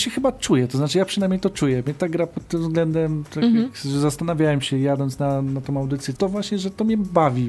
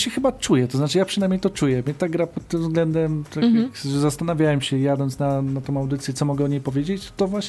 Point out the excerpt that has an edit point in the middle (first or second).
first